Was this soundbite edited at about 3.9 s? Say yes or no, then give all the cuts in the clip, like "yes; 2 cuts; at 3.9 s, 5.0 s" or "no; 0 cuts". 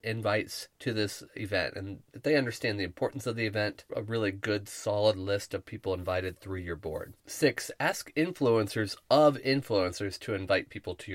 yes; 2 cuts; at 3.9 s, 7.2 s